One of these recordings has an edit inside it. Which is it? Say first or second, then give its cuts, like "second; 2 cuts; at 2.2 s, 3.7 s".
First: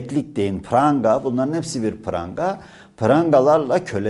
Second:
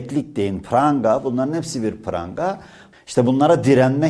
second; 1 cut; at 2.9 s